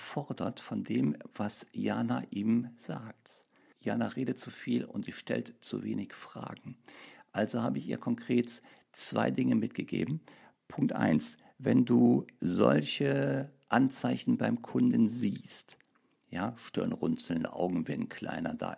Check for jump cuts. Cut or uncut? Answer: cut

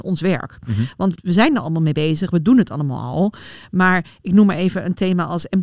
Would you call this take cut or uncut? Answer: cut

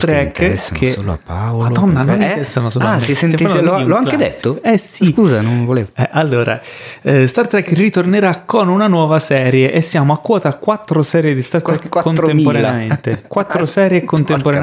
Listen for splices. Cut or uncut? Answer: uncut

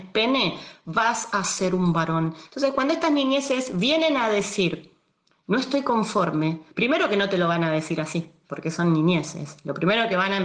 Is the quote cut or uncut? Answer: cut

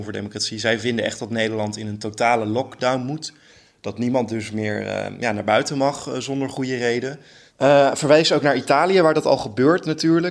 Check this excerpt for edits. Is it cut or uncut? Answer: uncut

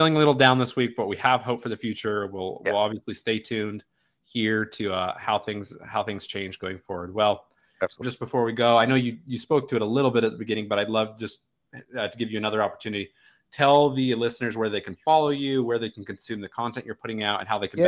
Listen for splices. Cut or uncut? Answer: cut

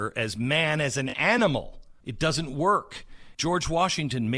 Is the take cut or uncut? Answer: cut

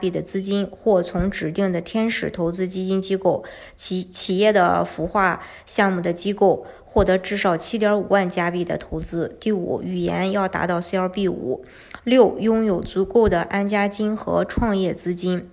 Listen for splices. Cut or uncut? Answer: uncut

